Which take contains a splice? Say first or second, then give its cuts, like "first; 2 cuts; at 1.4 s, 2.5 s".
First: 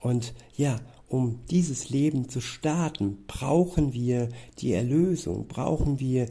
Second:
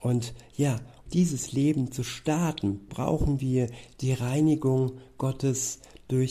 second; 2 cuts; at 1.1 s, 2.9 s